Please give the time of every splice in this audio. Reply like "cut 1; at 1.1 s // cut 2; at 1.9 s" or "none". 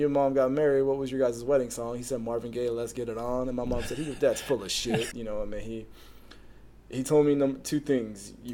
cut 1; at 5.1 s // cut 2; at 7.0 s